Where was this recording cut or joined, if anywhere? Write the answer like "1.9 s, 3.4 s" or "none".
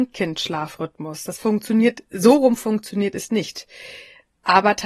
none